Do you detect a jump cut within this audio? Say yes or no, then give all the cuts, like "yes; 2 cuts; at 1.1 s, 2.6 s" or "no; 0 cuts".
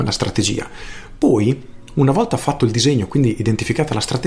no; 0 cuts